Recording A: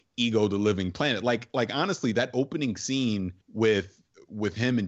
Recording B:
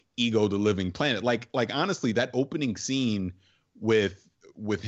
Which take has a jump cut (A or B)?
A